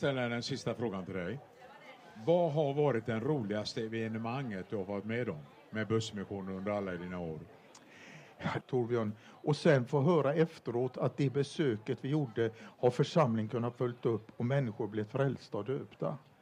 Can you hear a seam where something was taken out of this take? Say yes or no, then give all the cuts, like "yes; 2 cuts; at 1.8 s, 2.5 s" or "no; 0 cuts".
yes; 1 cut; at 8.6 s